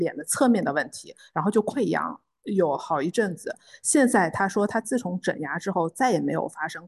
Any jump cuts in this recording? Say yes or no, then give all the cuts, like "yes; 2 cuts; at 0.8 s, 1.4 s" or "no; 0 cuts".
no; 0 cuts